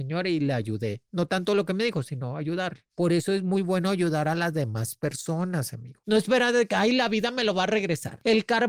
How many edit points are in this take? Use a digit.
1